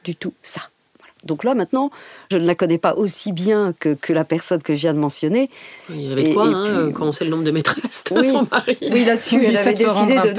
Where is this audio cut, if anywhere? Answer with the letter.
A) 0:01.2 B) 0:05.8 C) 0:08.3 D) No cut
B